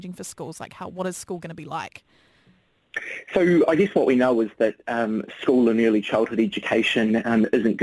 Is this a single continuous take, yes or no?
yes